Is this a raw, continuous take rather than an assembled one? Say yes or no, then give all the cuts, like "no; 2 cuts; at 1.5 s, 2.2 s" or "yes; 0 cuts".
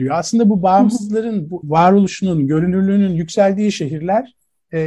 no; 1 cut; at 1.6 s